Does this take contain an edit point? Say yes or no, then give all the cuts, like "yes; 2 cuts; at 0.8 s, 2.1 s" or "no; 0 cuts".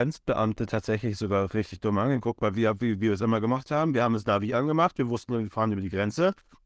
no; 0 cuts